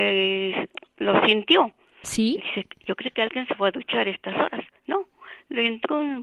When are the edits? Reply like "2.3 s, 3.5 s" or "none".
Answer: 2.4 s